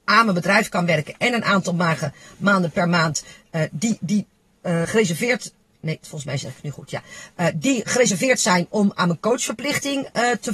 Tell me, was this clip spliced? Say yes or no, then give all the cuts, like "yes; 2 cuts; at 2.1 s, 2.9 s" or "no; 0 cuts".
yes; 2 cuts; at 4.8 s, 6.0 s